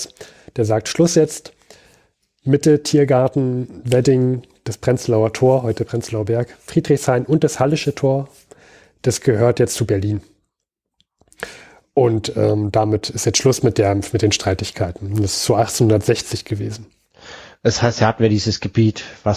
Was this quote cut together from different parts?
no; 0 cuts

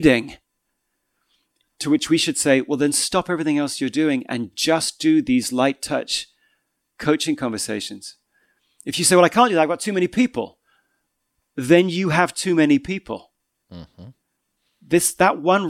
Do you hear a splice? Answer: no; 0 cuts

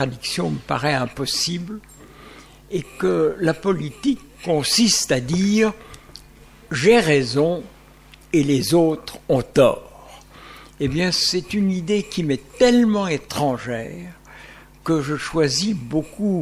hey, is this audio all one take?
yes; 0 cuts

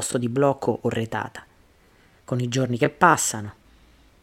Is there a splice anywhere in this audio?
yes; 1 cut; at 2.2 s

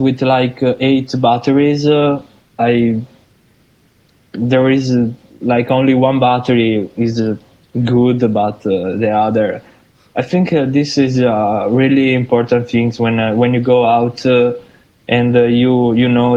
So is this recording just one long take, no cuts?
yes; 0 cuts

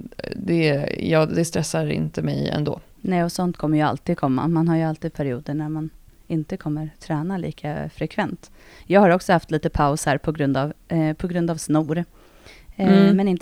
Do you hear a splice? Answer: no; 0 cuts

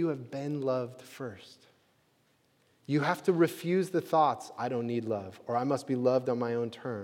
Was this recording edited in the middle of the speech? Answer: no; 0 cuts

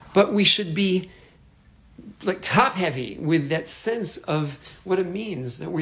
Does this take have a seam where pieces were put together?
no; 0 cuts

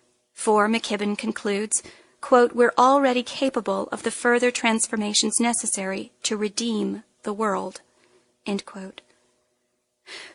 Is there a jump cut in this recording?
no; 0 cuts

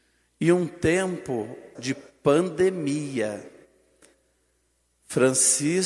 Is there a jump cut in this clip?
yes; 1 cut; at 1.8 s

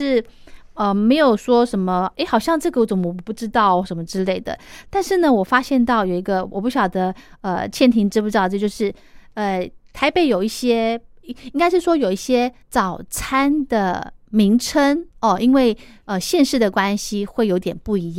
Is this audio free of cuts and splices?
no; 2 cuts; at 12.6 s, 15.1 s

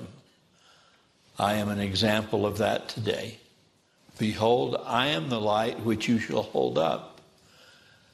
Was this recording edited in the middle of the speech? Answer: yes; 1 cut; at 4.0 s

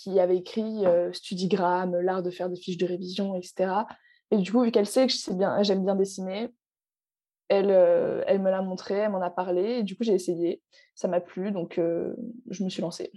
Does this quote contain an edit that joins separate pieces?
no; 0 cuts

